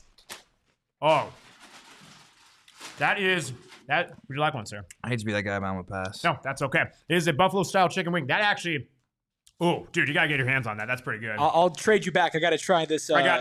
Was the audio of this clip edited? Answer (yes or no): no